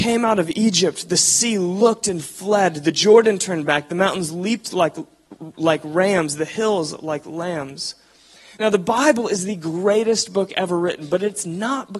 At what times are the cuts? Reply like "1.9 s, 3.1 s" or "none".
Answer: none